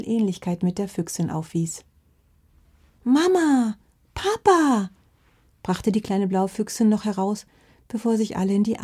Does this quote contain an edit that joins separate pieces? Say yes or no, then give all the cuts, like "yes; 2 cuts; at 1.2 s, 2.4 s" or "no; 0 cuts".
no; 0 cuts